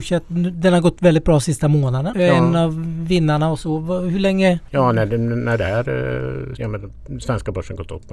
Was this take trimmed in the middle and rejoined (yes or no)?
yes